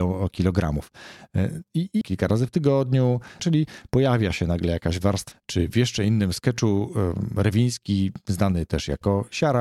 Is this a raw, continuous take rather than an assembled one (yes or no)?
no